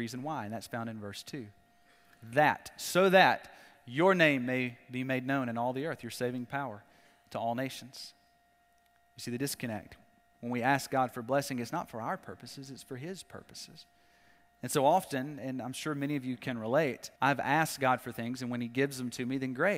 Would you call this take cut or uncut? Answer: cut